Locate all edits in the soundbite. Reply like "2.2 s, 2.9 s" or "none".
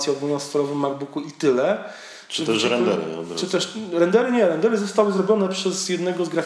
none